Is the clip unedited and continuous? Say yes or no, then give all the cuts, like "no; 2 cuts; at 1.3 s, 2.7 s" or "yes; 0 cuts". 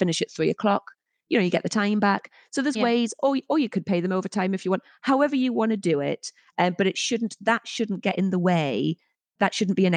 yes; 0 cuts